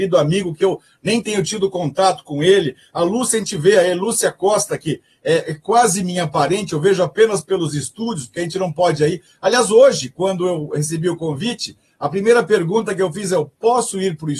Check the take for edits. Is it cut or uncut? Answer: uncut